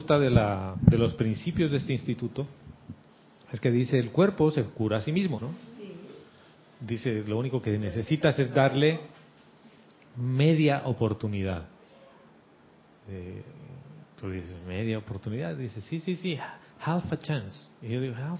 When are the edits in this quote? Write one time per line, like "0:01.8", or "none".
0:05.4